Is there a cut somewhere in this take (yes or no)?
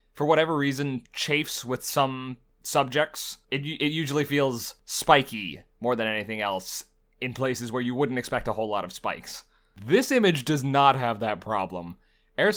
no